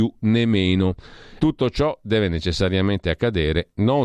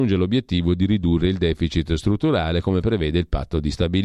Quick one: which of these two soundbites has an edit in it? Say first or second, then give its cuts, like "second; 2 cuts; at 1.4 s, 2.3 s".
first; 1 cut; at 1.4 s